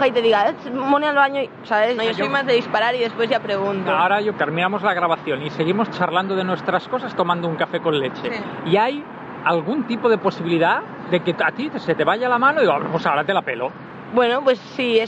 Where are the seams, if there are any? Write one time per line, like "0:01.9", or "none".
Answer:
0:02.0
0:04.3